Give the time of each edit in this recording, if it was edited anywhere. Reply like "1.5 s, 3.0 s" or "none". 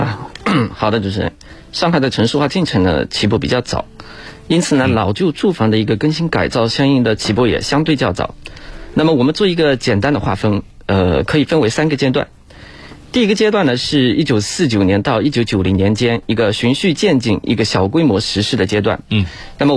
none